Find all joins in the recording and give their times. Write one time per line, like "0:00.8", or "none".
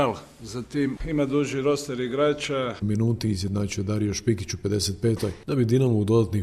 0:01.0
0:02.8

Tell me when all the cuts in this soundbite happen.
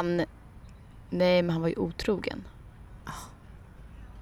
0:03.0

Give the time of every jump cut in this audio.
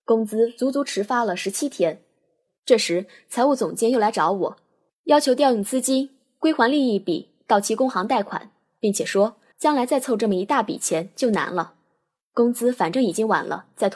0:02.5
0:09.5

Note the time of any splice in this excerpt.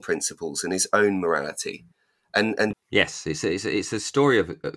0:02.7

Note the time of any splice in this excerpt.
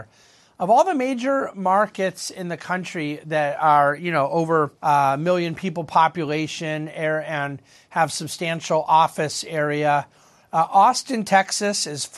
0:04.8

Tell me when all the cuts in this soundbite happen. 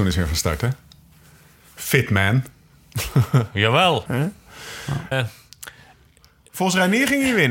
0:04.1
0:05.1

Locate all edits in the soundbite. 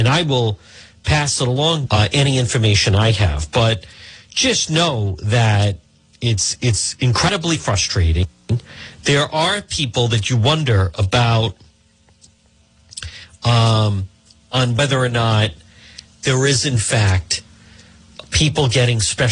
0:01.9

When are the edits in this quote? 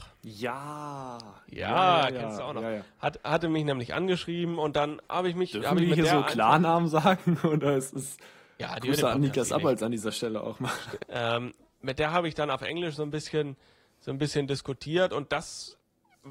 0:11.0

